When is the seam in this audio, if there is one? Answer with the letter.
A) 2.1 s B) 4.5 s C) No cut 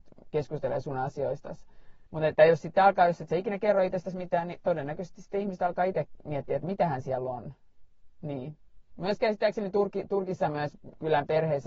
A